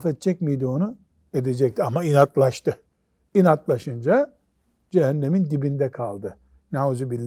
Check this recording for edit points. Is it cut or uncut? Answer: uncut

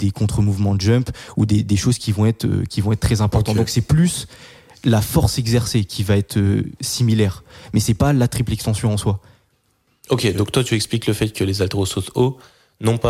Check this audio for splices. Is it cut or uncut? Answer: uncut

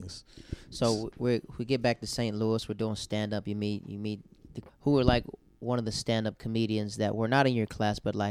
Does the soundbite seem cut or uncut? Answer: cut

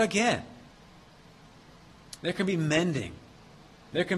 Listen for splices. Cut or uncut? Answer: cut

